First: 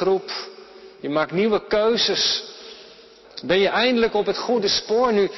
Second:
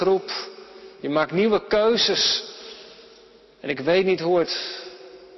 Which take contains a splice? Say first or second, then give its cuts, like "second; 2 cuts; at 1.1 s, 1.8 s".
first; 1 cut; at 3.2 s